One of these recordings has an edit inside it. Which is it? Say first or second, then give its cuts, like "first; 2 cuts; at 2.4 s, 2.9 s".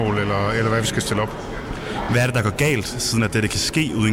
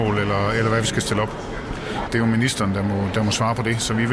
second; 1 cut; at 2.0 s